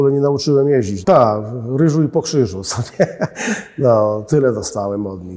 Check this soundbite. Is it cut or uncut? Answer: cut